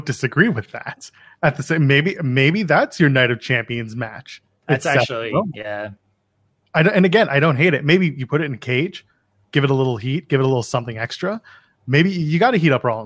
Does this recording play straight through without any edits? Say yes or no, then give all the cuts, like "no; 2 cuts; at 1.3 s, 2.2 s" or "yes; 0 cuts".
yes; 0 cuts